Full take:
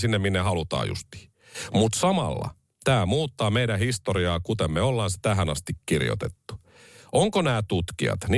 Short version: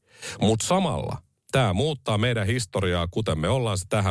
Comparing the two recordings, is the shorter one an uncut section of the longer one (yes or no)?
yes